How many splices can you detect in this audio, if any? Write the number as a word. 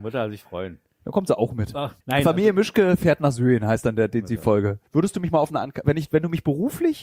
two